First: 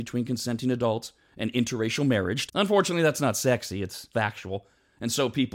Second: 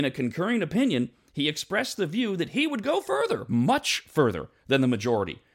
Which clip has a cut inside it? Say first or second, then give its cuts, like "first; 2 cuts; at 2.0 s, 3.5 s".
first; 2 cuts; at 2.5 s, 4.1 s